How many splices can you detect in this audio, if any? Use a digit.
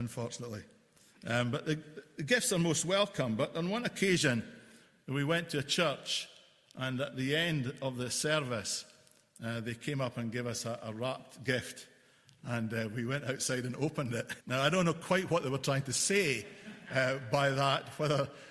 1